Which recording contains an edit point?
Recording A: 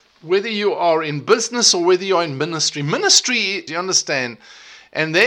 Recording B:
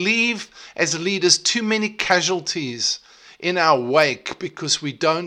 A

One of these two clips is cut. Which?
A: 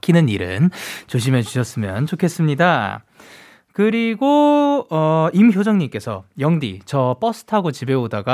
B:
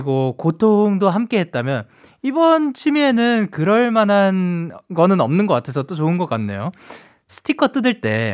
B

